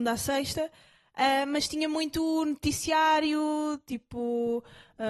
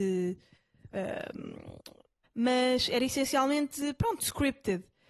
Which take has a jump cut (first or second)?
second